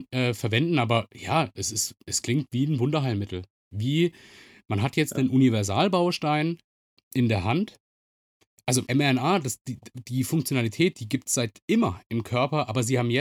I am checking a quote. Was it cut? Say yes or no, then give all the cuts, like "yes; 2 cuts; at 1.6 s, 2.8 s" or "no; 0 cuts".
yes; 1 cut; at 8.9 s